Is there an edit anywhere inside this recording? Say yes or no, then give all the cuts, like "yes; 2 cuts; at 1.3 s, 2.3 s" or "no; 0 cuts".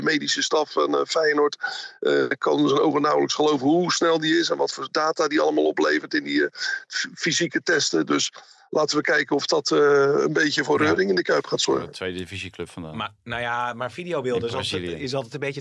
no; 0 cuts